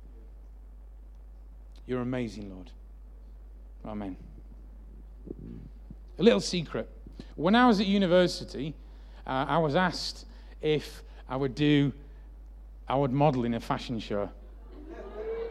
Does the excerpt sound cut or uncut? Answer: uncut